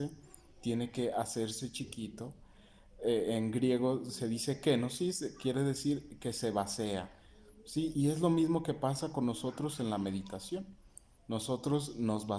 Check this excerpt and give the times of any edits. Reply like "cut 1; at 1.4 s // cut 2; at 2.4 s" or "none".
cut 1; at 7.9 s